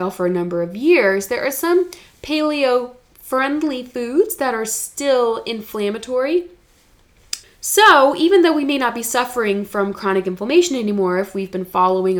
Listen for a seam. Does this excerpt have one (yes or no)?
yes